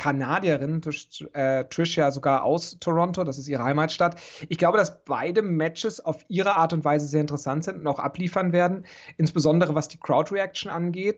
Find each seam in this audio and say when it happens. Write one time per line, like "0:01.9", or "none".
none